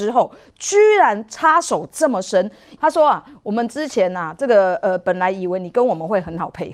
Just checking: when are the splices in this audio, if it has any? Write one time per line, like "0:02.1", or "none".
0:02.8